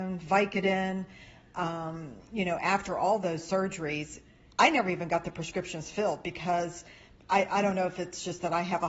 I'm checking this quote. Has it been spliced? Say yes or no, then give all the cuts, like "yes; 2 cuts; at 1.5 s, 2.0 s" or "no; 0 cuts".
no; 0 cuts